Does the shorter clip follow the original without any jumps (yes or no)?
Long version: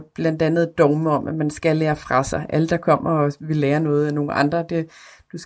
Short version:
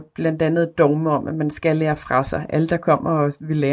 yes